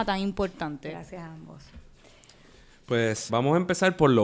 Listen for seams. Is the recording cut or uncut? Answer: cut